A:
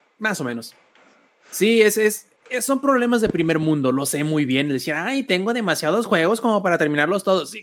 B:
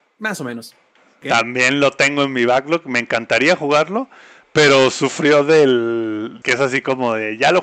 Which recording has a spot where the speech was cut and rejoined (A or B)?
B